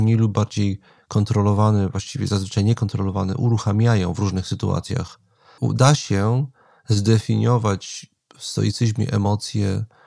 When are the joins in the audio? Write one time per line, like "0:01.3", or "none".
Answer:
0:05.6